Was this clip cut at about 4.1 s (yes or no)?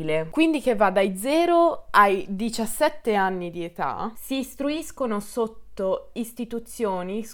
yes